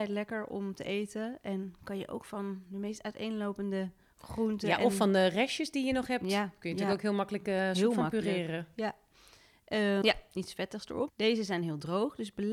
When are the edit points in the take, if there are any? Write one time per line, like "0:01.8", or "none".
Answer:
0:10.0
0:11.1